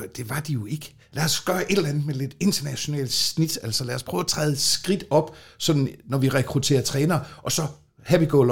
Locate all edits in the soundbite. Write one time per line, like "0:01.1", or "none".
0:01.1